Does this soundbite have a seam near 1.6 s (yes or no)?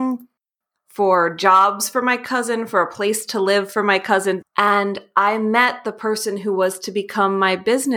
no